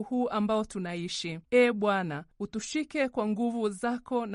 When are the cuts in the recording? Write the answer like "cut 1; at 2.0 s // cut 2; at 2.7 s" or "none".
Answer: cut 1; at 1.4 s